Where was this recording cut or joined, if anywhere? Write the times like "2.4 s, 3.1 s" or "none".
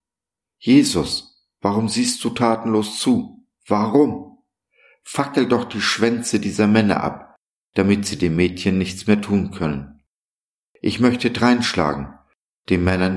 none